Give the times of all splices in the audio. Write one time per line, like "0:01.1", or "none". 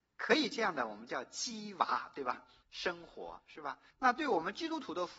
0:02.6
0:03.9